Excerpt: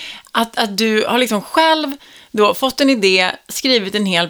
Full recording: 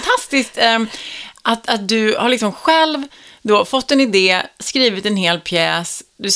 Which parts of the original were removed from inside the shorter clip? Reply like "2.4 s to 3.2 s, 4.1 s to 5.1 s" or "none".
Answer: none